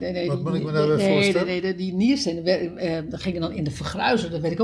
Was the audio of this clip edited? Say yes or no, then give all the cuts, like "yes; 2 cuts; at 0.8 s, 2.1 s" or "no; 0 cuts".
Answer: no; 0 cuts